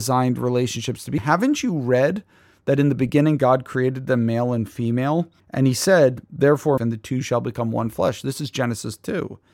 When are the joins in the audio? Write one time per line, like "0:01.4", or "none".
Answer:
0:01.2
0:05.4
0:06.8

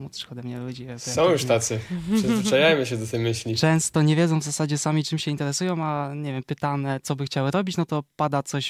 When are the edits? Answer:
none

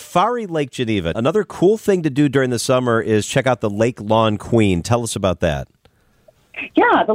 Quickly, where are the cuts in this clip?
0:01.1

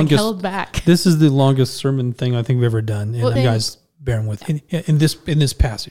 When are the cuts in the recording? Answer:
0:03.4
0:04.4

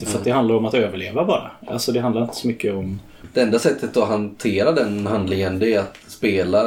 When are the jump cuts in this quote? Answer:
0:03.2

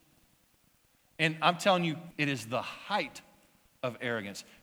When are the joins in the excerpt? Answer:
0:02.1

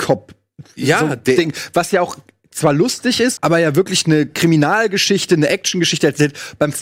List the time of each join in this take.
0:03.4

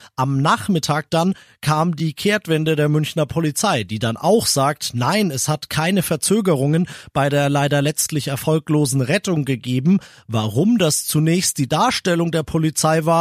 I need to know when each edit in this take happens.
none

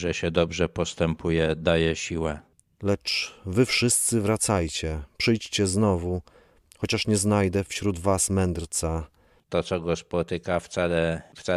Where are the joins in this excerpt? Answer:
0:09.4

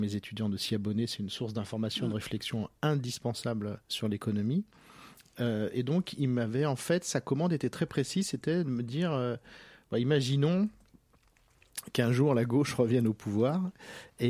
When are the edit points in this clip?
0:03.8

